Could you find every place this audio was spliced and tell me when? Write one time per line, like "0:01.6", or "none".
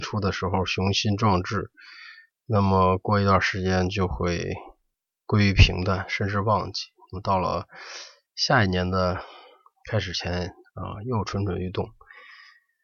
none